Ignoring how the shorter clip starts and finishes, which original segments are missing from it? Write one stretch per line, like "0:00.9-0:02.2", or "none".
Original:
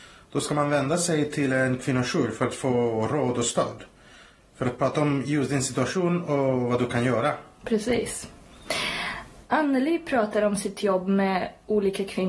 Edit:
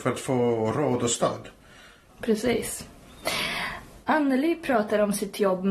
0:04.4-0:07.5